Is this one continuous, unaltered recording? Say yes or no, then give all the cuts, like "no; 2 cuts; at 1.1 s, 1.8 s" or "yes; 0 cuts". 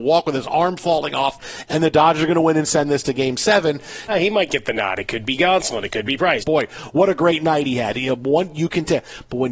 no; 2 cuts; at 4.1 s, 6.4 s